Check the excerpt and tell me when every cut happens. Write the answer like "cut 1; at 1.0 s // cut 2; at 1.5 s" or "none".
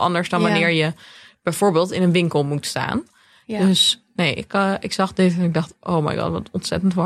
none